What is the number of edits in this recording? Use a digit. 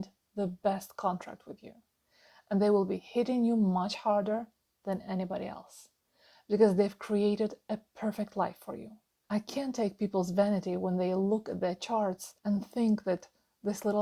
2